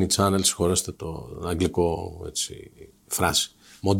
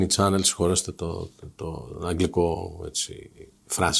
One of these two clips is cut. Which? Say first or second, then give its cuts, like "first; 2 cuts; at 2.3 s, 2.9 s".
first; 1 cut; at 0.9 s